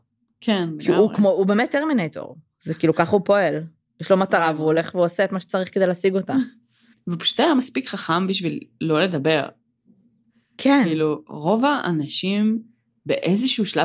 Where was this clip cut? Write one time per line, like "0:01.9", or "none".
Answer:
0:06.9